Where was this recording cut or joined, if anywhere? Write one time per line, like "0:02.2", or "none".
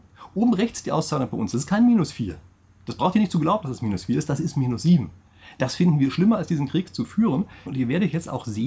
0:07.7